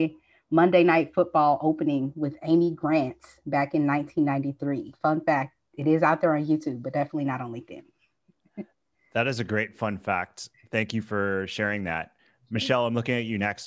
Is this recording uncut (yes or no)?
yes